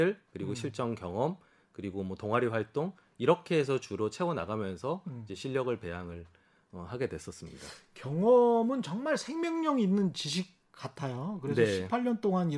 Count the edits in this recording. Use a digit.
0